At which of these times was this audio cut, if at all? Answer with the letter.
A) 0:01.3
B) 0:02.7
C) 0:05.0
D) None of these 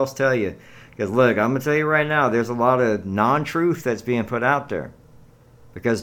D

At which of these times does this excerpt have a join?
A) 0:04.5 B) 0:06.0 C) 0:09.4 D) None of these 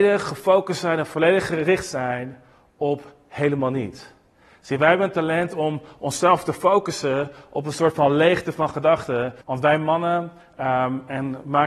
C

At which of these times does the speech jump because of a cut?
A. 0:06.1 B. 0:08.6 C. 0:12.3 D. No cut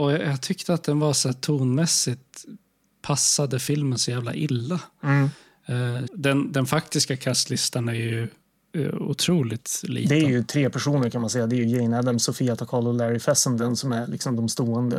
A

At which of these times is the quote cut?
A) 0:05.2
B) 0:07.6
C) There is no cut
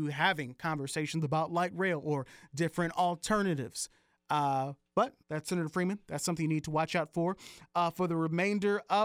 A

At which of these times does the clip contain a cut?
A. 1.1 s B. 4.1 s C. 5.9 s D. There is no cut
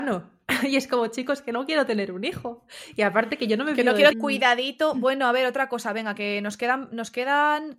B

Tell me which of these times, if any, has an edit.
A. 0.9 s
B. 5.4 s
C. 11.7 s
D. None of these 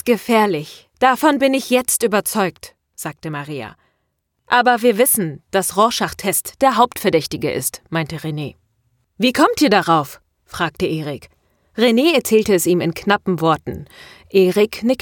D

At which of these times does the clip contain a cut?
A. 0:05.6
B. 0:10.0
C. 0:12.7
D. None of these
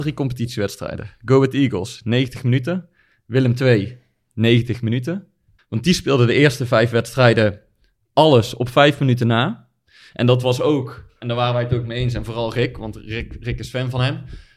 A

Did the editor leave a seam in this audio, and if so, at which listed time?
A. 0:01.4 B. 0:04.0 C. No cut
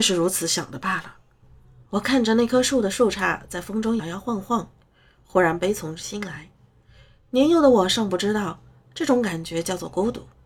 B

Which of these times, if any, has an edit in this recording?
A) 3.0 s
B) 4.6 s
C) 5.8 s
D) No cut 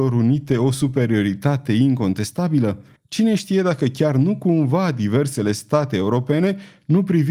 A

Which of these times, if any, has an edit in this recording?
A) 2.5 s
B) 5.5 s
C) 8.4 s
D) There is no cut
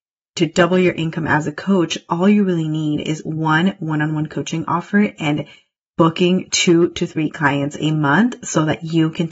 D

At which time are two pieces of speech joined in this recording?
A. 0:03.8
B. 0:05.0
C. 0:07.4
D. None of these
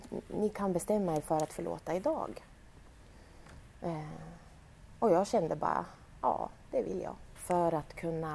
C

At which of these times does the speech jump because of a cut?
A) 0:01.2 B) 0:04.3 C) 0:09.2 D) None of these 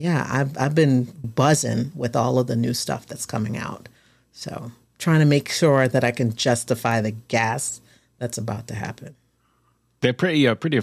A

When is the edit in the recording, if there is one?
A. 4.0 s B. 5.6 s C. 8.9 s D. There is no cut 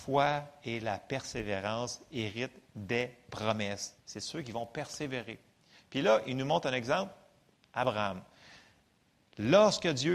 A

